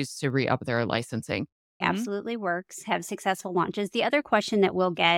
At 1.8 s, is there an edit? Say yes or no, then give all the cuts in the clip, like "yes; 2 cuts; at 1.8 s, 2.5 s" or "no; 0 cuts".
yes; 1 cut; at 1.8 s